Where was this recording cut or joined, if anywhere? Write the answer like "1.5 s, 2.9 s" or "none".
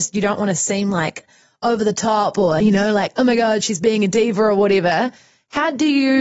none